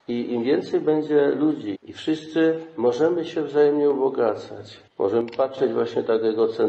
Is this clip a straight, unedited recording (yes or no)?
no